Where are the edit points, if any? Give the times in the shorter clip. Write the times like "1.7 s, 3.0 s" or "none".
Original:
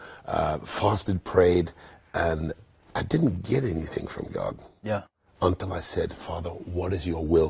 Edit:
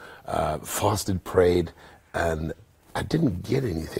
none